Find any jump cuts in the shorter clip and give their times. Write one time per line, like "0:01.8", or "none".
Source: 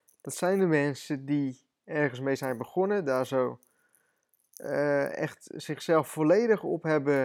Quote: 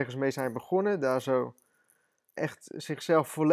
0:02.4